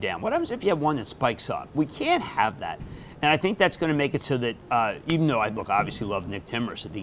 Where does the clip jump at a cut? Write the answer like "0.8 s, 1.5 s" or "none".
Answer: none